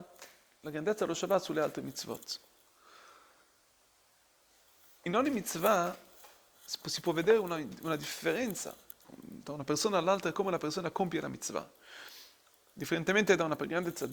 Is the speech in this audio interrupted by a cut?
yes; 1 cut; at 9.0 s

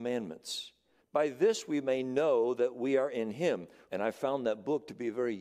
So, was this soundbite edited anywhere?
yes; 2 cuts; at 1.0 s, 3.9 s

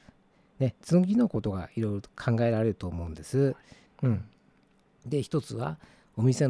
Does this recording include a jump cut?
yes; 1 cut; at 3.9 s

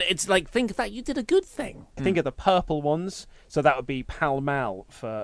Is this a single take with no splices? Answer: no; 1 cut; at 2.0 s

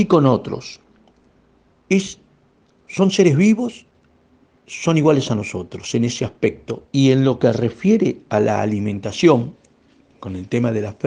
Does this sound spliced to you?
yes; 1 cut; at 6.8 s

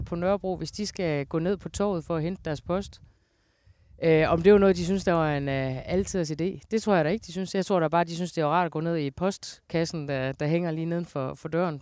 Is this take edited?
no; 0 cuts

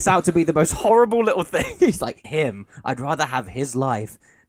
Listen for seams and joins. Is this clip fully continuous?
no; 1 cut; at 2.2 s

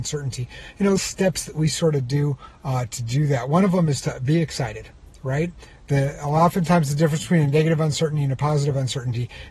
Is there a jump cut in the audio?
yes; 1 cut; at 1.0 s

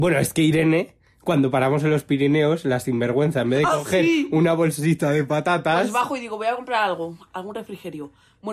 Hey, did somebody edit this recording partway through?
no; 0 cuts

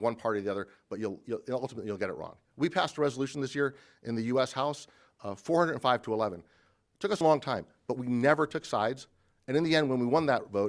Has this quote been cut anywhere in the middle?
yes; 2 cuts; at 1.2 s, 7.2 s

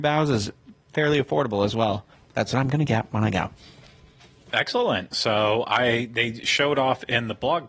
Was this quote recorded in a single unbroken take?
no; 1 cut; at 2.1 s

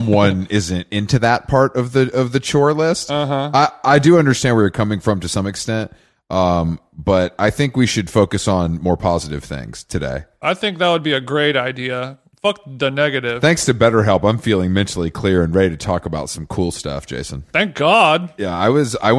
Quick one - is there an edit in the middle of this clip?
no; 0 cuts

